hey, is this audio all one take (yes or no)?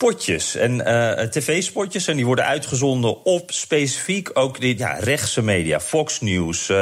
no